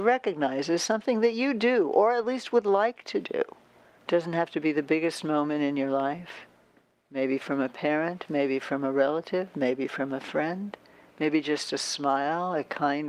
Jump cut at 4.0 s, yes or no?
yes